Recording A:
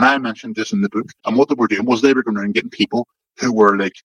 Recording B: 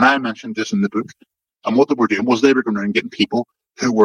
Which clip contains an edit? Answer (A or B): A